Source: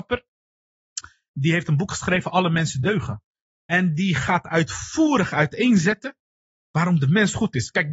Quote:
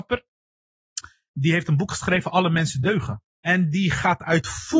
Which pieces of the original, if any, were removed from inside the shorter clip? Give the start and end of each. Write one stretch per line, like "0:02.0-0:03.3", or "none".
0:03.3-0:03.5